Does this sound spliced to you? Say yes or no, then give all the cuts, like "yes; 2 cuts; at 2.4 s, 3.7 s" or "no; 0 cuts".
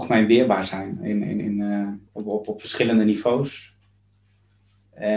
yes; 1 cut; at 2.1 s